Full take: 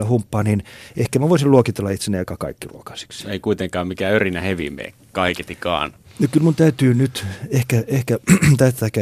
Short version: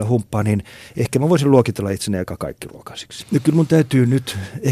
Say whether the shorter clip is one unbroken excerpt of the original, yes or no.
no